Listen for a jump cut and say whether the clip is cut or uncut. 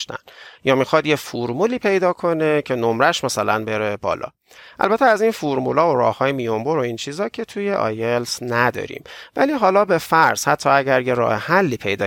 uncut